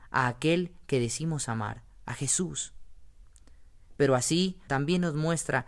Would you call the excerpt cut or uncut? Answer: cut